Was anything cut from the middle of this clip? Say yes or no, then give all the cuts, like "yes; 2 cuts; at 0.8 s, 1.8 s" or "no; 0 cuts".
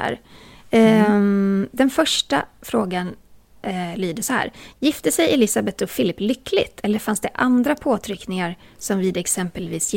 no; 0 cuts